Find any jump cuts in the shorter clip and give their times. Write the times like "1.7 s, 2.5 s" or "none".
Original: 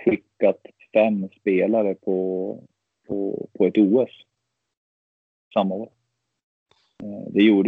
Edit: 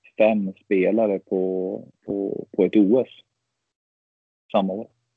2.0 s